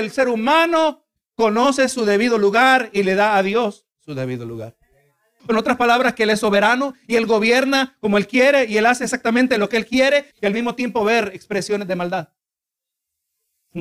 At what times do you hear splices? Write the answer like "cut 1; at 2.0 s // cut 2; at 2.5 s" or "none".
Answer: cut 1; at 5.4 s // cut 2; at 10.3 s